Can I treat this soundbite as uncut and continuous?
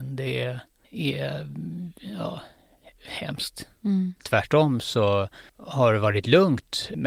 no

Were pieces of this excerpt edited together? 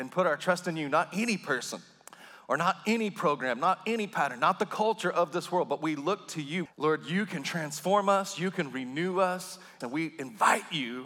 yes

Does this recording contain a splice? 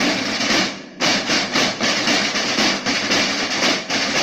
no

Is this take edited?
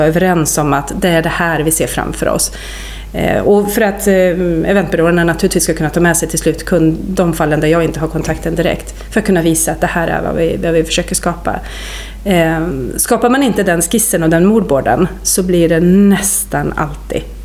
no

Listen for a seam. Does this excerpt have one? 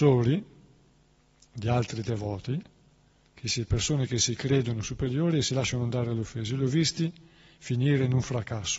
no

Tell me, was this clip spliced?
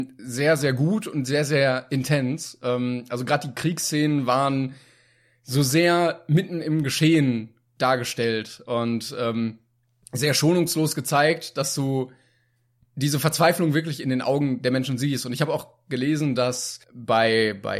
yes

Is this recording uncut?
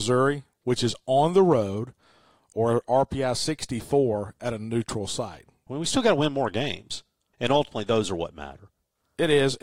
no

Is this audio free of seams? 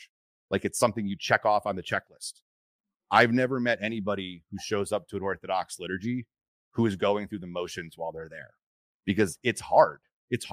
yes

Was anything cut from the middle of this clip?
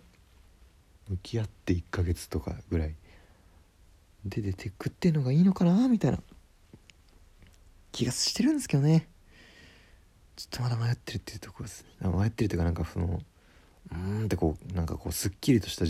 no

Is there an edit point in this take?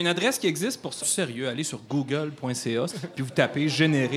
yes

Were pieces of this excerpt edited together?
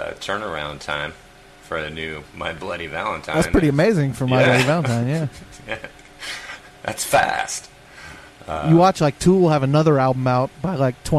no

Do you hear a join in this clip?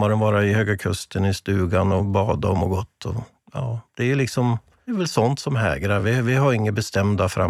no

